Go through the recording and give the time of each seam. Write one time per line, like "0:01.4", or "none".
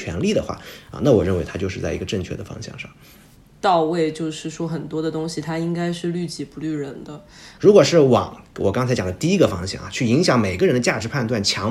0:03.5
0:07.6